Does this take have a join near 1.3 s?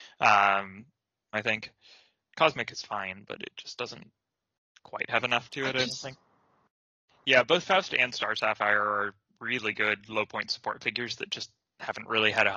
yes; 2 cuts; at 1.3 s, 7.1 s

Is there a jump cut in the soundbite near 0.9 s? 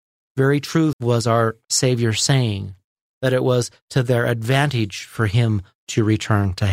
yes; 1 cut; at 0.9 s

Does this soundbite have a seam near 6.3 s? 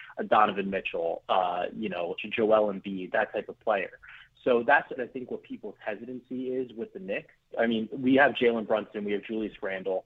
no; 3 cuts; at 2.2 s, 5.0 s, 7.5 s

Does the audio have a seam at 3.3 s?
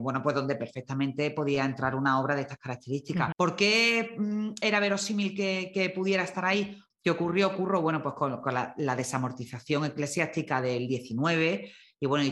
yes; 2 cuts; at 3.3 s, 6.9 s

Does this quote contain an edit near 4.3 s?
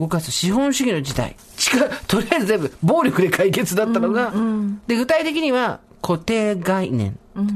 no; 1 cut; at 1.4 s

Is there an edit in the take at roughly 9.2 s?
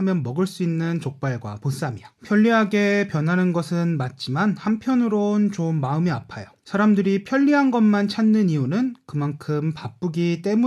no; 2 cuts; at 2.2 s, 6.6 s

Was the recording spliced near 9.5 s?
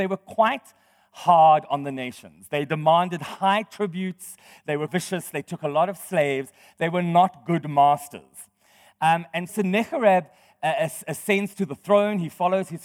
yes; 2 cuts; at 4.9 s, 9.5 s

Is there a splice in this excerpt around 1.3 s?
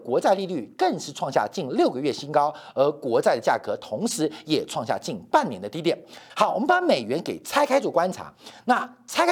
no; 1 cut; at 6.3 s

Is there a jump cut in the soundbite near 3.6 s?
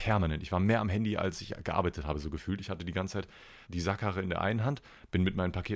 yes; 1 cut; at 3.6 s

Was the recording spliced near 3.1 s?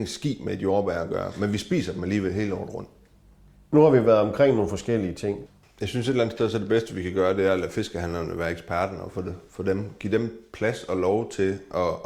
no; 1 cut; at 5.6 s

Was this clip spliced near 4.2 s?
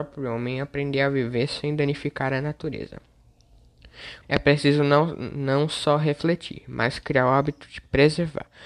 yes; 1 cut; at 4.2 s

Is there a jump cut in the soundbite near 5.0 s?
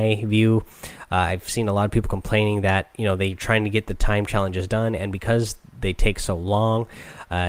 no; 0 cuts

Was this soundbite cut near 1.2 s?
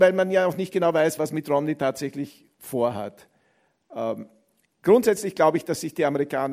yes; 1 cut; at 1.2 s

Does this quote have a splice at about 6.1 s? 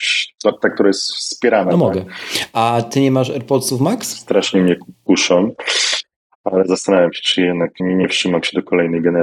no; 1 cut; at 7.8 s

